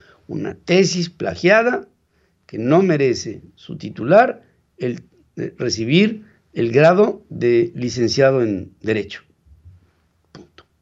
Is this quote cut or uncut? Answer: uncut